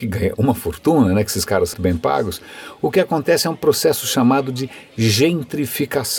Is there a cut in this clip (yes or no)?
yes